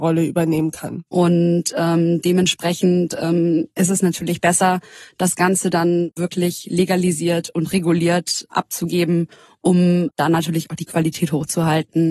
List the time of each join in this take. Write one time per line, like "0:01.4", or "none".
0:01.1